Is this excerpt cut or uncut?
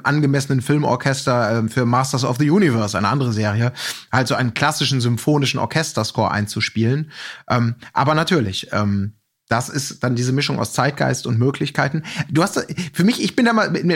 uncut